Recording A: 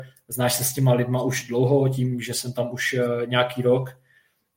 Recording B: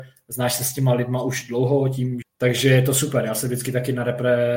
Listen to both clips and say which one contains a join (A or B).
B